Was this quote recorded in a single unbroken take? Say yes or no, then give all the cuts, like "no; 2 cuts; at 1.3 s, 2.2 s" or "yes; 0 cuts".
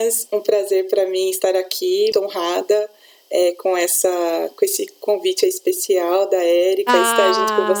no; 1 cut; at 2.1 s